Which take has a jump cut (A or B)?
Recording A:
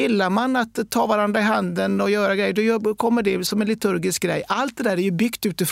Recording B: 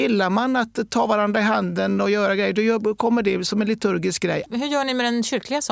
B